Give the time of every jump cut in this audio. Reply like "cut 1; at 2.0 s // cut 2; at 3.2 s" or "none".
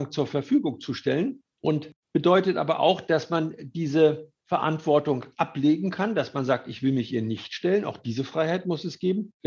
none